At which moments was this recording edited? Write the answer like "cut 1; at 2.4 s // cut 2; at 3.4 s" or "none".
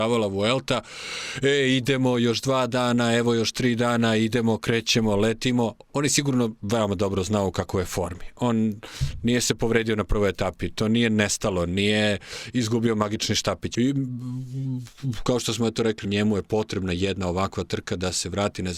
cut 1; at 13.7 s // cut 2; at 16.0 s